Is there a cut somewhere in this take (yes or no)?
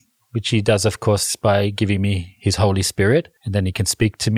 yes